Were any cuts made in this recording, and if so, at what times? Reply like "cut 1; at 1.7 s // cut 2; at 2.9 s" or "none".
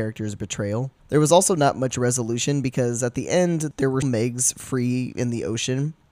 cut 1; at 4.0 s